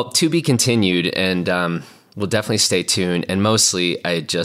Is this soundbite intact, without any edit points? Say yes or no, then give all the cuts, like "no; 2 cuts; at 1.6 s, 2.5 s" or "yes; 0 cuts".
yes; 0 cuts